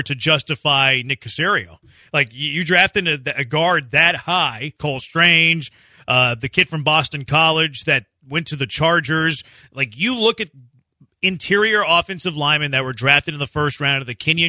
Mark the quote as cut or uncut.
cut